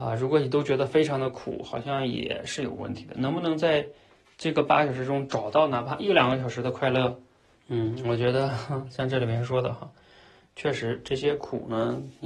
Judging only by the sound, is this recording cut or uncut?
cut